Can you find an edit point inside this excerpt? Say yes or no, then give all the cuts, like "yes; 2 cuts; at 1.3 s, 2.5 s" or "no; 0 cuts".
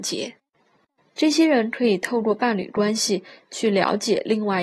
yes; 1 cut; at 1.0 s